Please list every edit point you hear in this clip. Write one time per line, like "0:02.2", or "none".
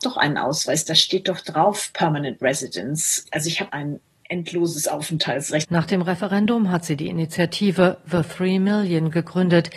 0:05.6